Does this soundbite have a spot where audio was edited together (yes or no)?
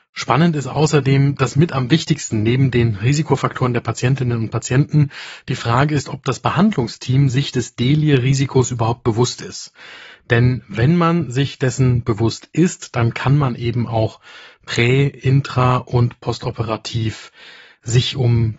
no